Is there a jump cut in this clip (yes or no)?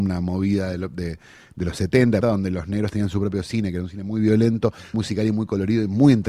yes